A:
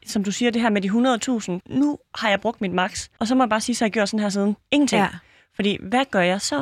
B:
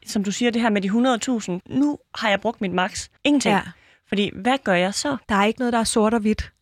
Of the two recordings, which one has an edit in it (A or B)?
B